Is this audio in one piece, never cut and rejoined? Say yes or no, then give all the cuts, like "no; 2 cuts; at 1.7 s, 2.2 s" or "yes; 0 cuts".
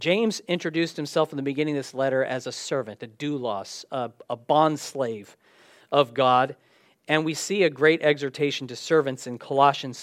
yes; 0 cuts